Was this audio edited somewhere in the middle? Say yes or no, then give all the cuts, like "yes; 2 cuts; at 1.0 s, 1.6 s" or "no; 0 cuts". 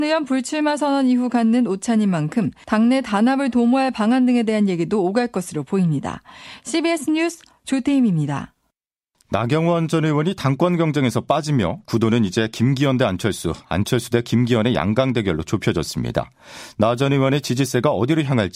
no; 0 cuts